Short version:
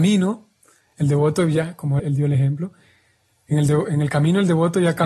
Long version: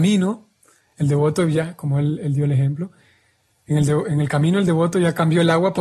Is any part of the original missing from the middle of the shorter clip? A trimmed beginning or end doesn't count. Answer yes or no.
yes